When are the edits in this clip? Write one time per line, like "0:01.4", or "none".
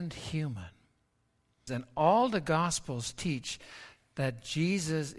0:01.7